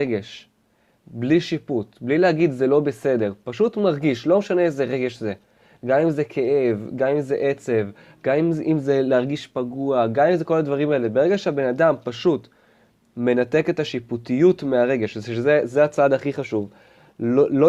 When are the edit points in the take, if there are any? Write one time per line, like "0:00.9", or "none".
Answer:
none

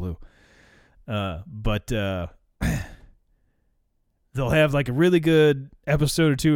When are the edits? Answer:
none

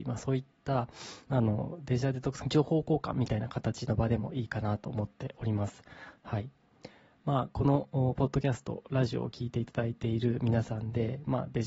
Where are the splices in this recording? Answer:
0:02.4

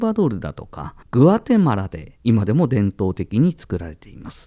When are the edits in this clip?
0:01.0

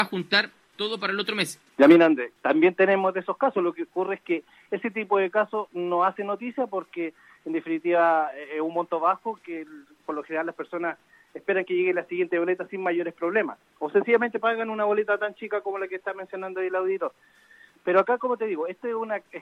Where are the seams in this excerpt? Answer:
0:01.7

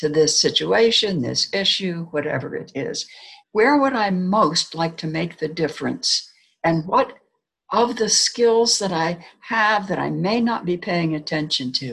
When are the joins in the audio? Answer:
0:03.4

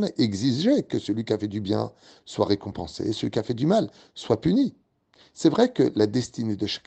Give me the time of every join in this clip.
none

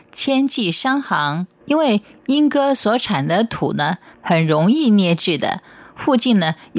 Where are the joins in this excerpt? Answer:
0:01.6
0:04.1

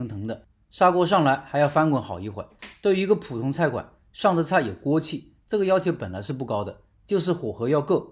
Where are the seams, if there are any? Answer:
none

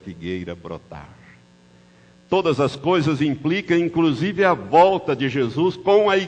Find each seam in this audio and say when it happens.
none

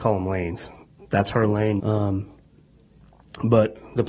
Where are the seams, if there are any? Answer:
0:01.8

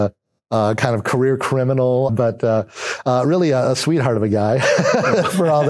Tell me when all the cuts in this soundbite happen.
0:02.1

